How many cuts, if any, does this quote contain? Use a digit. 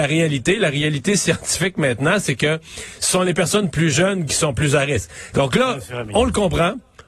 1